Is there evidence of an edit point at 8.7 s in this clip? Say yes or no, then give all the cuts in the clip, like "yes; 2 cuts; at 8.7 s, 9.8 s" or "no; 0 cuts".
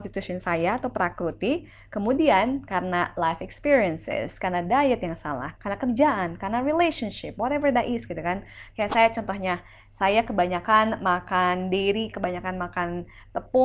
yes; 3 cuts; at 5.6 s, 8.7 s, 12.1 s